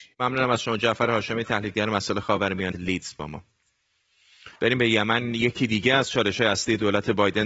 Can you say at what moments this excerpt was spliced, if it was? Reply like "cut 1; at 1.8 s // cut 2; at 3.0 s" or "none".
cut 1; at 2.7 s // cut 2; at 4.6 s